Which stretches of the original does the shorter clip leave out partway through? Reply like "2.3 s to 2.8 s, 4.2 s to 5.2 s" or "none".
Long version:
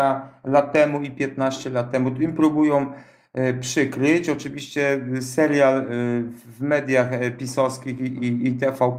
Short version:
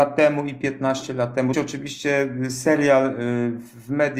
2.1 s to 4.2 s